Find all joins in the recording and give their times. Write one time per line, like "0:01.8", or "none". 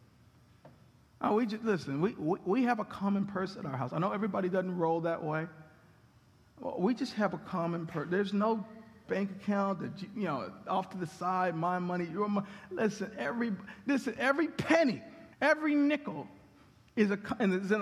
0:15.3